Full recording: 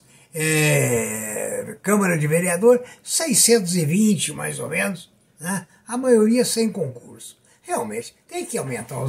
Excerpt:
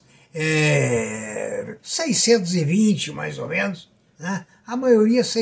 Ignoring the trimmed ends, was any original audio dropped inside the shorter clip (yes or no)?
yes